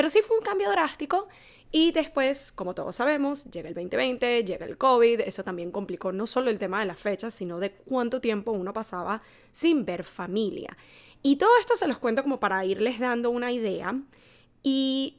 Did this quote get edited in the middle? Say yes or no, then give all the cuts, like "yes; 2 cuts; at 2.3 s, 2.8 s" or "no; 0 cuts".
no; 0 cuts